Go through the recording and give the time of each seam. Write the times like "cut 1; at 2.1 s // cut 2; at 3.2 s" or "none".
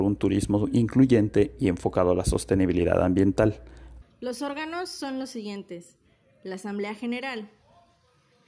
cut 1; at 4.0 s